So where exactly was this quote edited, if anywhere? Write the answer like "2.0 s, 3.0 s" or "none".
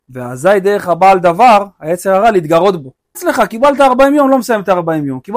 3.1 s